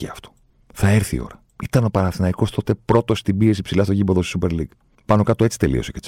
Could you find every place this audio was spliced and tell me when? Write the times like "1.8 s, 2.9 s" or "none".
4.9 s